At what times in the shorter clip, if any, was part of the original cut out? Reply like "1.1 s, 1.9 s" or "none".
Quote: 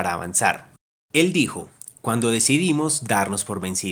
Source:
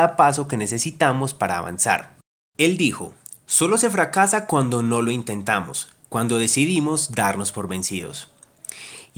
1.9 s